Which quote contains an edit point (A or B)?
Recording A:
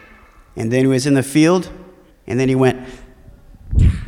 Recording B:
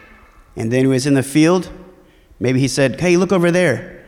A